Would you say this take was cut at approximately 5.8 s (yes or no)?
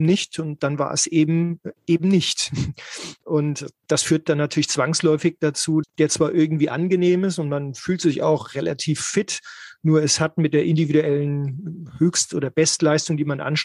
yes